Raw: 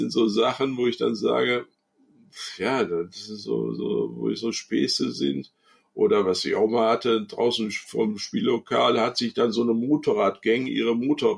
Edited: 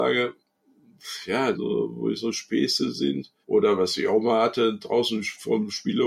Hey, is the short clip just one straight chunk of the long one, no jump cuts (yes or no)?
no